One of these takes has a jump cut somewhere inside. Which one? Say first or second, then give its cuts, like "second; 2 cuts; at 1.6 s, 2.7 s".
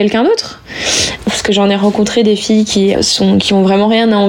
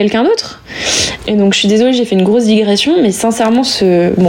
first; 2 cuts; at 1.2 s, 2.9 s